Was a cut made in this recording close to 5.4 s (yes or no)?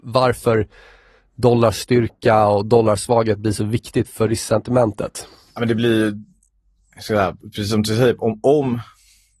no